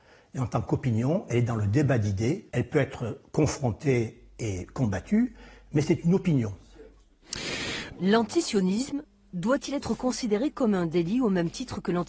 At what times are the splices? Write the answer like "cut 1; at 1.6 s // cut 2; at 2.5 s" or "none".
cut 1; at 2.5 s // cut 2; at 7.9 s